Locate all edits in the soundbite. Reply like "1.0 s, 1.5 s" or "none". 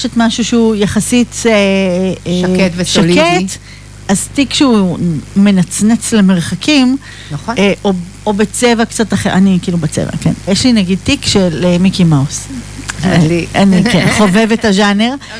10.5 s